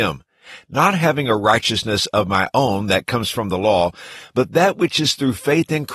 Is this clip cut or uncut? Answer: uncut